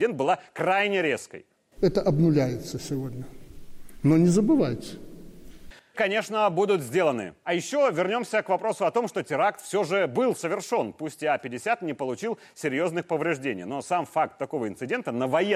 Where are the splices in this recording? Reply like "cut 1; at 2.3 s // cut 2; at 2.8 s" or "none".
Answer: cut 1; at 1.8 s // cut 2; at 5.9 s // cut 3; at 7.4 s